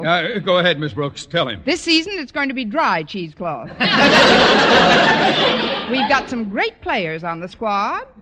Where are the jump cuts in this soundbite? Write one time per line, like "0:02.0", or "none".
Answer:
none